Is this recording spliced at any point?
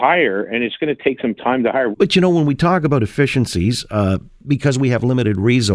yes; 1 cut; at 1.9 s

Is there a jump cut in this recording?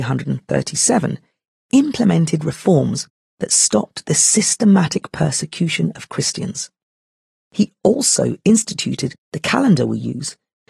no; 0 cuts

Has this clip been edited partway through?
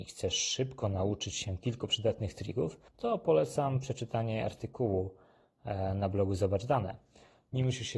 yes; 1 cut; at 2.9 s

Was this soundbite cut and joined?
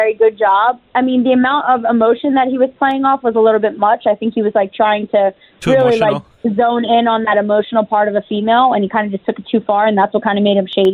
no; 0 cuts

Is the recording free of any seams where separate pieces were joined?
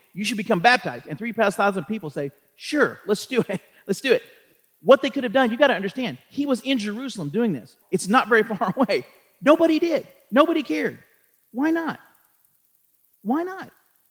no; 1 cut; at 7.8 s

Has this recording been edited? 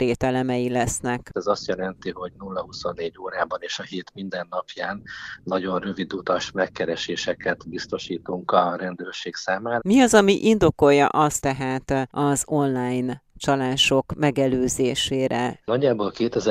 yes; 3 cuts; at 1.3 s, 9.8 s, 11.4 s

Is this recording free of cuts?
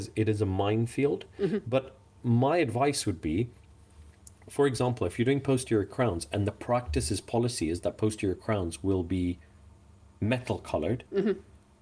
yes; 0 cuts

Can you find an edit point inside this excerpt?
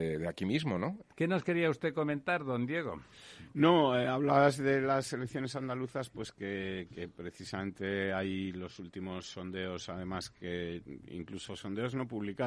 yes; 1 cut; at 1.0 s

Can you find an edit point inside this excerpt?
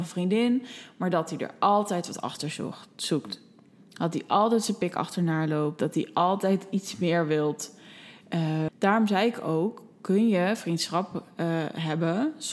yes; 1 cut; at 8.7 s

